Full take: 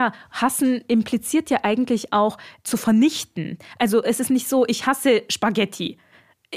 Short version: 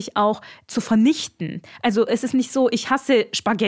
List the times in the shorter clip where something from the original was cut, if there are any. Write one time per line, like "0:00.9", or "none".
none